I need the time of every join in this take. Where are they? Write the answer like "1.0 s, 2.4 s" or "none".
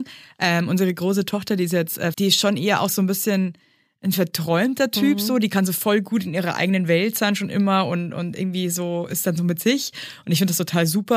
2.1 s